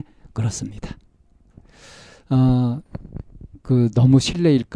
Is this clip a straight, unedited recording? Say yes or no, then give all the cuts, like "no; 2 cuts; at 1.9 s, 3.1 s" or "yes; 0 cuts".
yes; 0 cuts